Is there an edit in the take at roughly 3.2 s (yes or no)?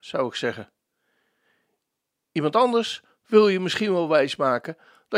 yes